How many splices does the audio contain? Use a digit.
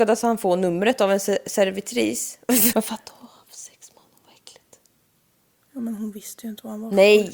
1